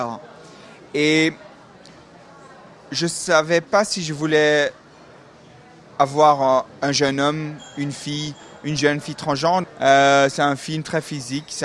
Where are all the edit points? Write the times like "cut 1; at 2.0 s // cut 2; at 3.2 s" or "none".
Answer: cut 1; at 9.6 s